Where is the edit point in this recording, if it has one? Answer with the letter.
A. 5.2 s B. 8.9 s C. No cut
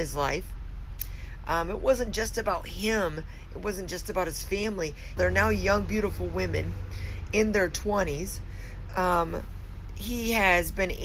A